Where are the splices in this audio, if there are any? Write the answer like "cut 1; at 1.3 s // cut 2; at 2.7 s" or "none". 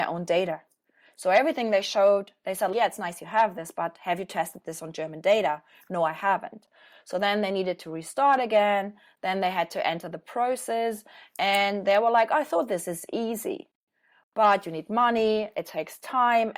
none